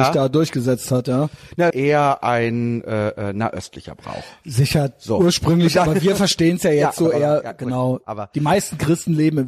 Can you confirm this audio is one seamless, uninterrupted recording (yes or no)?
no